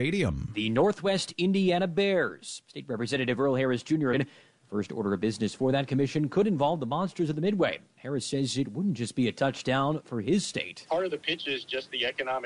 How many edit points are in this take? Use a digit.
1